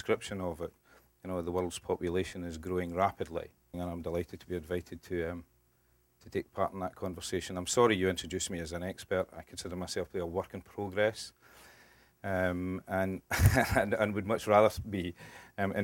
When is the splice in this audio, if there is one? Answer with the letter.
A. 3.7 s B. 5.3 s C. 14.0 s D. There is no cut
A